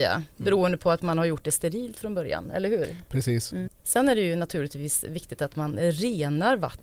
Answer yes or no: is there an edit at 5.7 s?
no